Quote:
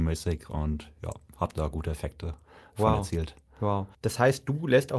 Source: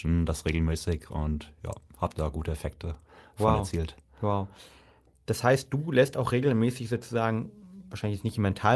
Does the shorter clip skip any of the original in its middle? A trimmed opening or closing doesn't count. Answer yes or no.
yes